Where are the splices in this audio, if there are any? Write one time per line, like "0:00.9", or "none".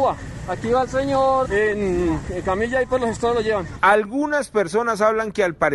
0:01.4